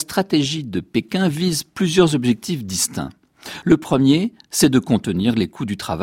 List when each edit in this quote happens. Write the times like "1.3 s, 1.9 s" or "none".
none